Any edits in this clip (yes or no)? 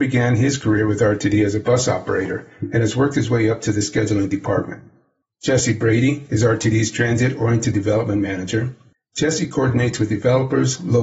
no